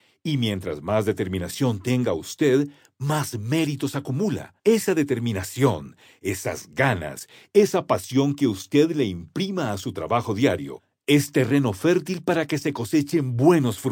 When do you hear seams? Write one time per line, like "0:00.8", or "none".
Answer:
0:04.6